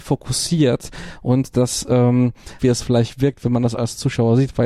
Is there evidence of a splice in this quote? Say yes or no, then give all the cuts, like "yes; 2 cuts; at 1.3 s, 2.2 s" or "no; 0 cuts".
yes; 1 cut; at 2.6 s